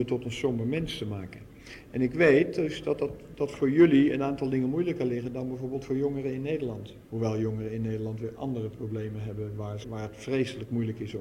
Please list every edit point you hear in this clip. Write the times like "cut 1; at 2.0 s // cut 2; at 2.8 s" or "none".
cut 1; at 7.1 s // cut 2; at 9.8 s